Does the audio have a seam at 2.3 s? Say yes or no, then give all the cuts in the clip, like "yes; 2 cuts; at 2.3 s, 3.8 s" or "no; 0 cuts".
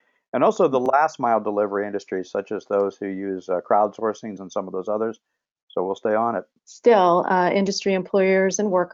no; 2 cuts; at 4.4 s, 6.6 s